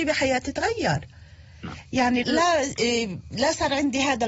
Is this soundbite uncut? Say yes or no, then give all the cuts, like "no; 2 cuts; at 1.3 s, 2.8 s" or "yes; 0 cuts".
no; 1 cut; at 2.2 s